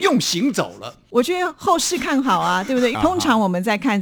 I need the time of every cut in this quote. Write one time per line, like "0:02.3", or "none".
0:01.1
0:02.9